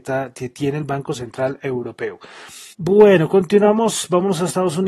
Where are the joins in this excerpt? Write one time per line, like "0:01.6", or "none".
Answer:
0:02.7